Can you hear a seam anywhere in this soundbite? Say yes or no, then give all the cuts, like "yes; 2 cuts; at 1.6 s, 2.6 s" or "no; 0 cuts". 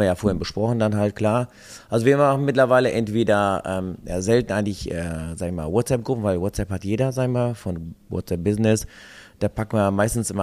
no; 0 cuts